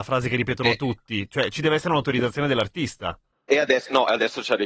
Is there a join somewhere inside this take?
no; 0 cuts

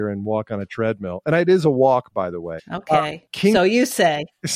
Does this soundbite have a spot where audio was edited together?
yes; 1 cut; at 2.6 s

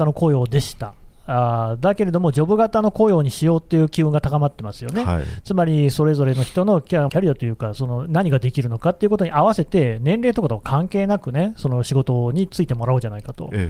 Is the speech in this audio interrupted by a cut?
yes; 1 cut; at 7.1 s

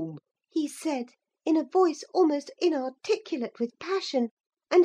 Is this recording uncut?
yes; 0 cuts

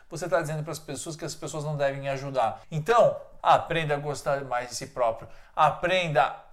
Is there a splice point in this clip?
yes; 2 cuts; at 3.4 s, 5.4 s

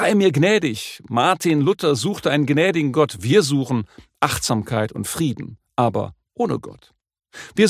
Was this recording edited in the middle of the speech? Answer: no; 0 cuts

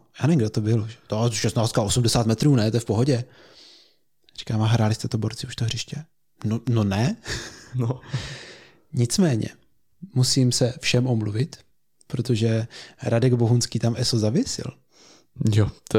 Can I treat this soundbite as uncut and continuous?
yes; 0 cuts

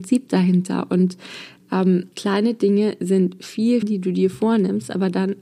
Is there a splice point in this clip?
yes; 2 cuts; at 2.1 s, 3.8 s

